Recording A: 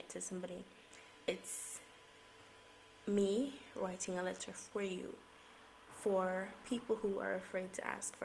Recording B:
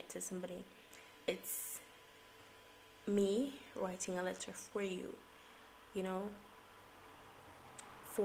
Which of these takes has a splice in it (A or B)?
A